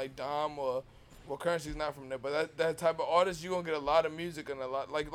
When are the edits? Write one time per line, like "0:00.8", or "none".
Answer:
0:01.1